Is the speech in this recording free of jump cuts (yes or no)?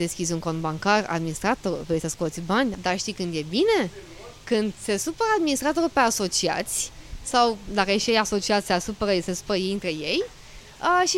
no